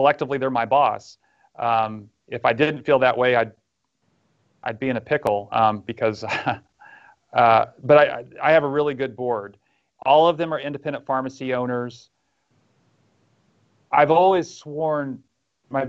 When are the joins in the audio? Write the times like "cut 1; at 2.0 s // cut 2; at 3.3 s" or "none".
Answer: none